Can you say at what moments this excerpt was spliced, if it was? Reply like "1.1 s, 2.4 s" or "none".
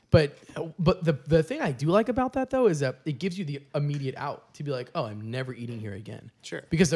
none